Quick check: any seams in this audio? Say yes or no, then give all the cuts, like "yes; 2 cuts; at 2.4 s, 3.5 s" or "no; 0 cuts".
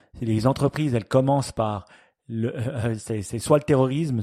no; 0 cuts